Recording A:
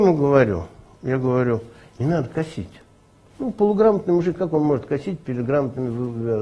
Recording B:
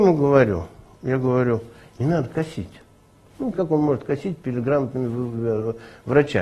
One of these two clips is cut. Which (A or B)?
B